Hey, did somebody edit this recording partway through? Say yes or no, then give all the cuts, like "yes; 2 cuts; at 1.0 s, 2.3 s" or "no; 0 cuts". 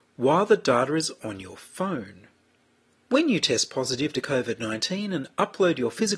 no; 0 cuts